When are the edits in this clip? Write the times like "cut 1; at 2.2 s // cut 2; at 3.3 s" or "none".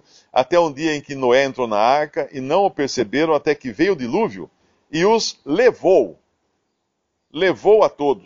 none